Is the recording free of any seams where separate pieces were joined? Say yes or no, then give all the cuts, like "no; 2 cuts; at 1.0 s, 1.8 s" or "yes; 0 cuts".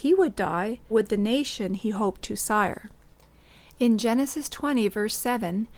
no; 1 cut; at 0.9 s